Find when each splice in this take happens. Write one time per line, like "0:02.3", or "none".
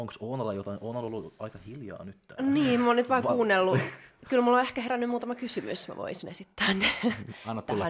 none

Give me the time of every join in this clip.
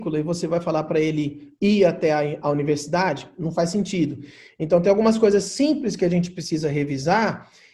0:02.4

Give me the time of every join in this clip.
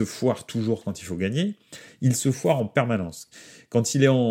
0:01.9

